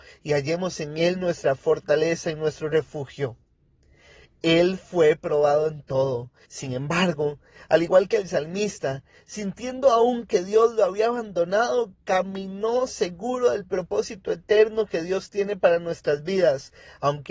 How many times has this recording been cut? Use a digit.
1